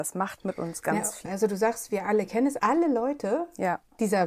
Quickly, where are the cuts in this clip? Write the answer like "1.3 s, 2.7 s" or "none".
1.2 s, 2.6 s